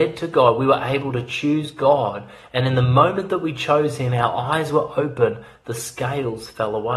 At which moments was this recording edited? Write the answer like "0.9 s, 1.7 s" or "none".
none